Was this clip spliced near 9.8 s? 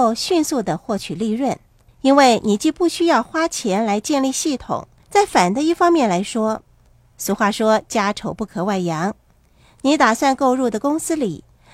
no; 1 cut; at 5.0 s

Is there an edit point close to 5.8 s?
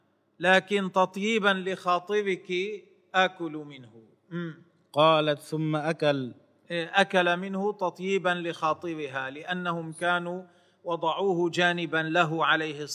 no; 0 cuts

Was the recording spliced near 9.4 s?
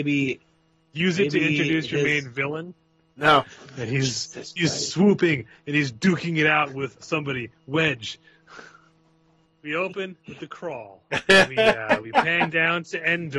yes; 3 cuts; at 3.1 s, 7.0 s, 9.4 s

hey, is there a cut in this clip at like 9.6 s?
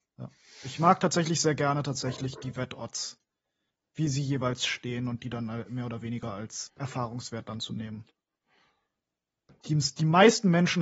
yes; 2 cuts; at 6.7 s, 9.6 s

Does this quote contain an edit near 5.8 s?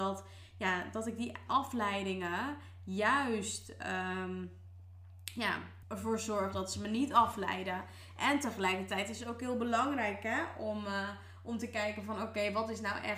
yes; 1 cut; at 5.8 s

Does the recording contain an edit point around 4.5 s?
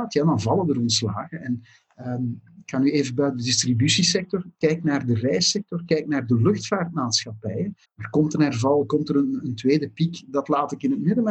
no; 2 cuts; at 7.8 s, 9.4 s

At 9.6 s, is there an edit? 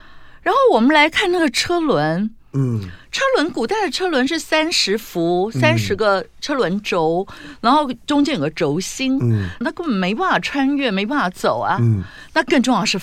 yes; 1 cut; at 9.6 s

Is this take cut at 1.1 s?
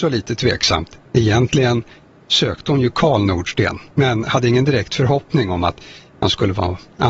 yes; 2 cuts; at 1.1 s, 3.9 s

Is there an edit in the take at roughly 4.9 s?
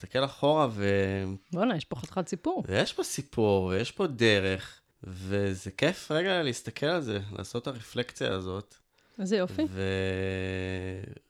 yes; 1 cut; at 4.9 s

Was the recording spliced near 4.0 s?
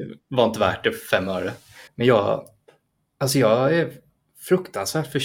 no; 1 cut; at 1.9 s

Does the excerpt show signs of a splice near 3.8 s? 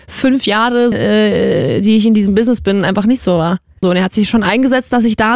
yes; 2 cuts; at 0.9 s, 3.8 s

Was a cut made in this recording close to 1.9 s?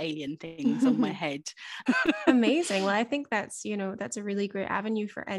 yes; 1 cut; at 1.9 s

